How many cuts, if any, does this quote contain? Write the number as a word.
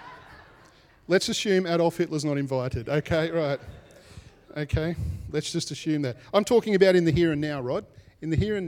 zero